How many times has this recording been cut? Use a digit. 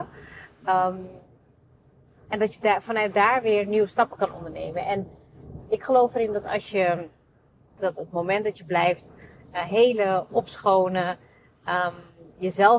1